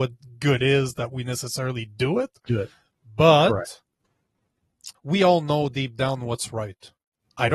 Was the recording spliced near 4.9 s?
yes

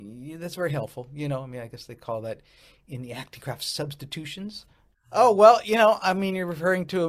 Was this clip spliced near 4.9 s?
yes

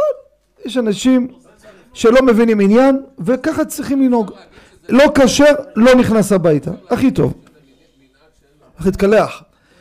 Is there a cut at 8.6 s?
yes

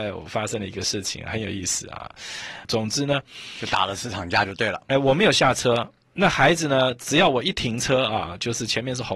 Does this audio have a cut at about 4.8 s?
no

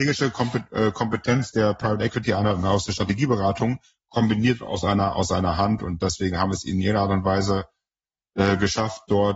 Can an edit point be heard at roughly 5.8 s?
no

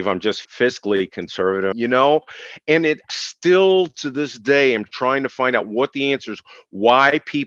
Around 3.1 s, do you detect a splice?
no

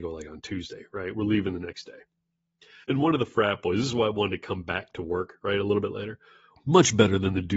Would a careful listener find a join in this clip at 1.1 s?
no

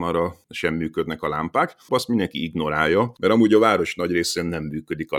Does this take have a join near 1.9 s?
yes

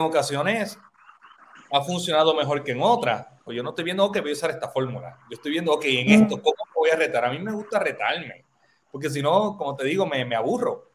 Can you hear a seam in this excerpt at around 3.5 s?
yes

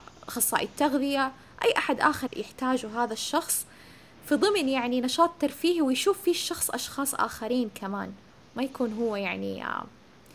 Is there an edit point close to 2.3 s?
yes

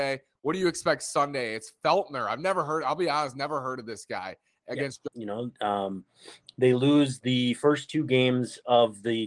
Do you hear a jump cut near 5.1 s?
yes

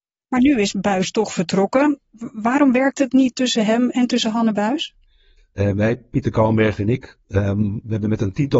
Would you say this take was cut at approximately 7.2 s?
no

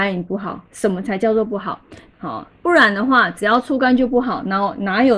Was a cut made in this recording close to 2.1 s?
yes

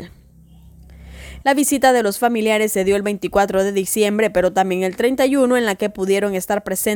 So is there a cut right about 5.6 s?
no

